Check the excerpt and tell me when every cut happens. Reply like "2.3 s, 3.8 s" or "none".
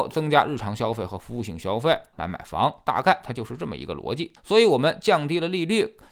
2.1 s, 4.4 s